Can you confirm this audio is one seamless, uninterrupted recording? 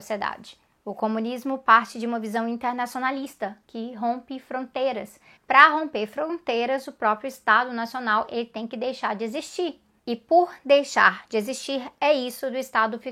no; 1 cut; at 5.4 s

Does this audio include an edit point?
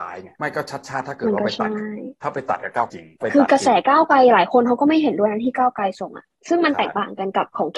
yes; 1 cut; at 2.9 s

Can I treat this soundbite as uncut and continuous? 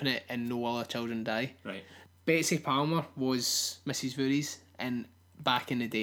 yes; 0 cuts

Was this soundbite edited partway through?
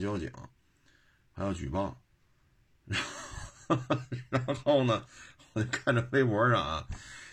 no; 0 cuts

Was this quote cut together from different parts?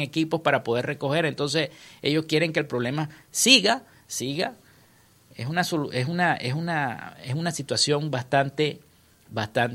no; 0 cuts

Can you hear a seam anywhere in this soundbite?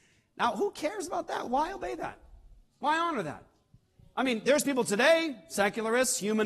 no; 0 cuts

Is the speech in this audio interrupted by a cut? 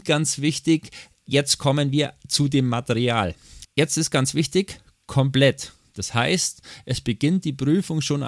yes; 1 cut; at 3.6 s

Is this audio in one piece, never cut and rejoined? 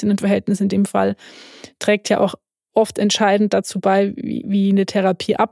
yes; 0 cuts

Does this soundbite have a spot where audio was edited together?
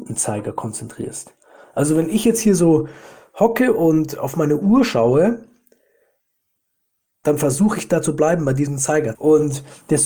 yes; 1 cut; at 9.1 s

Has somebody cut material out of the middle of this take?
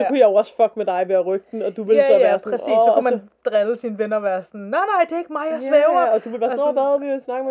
no; 0 cuts

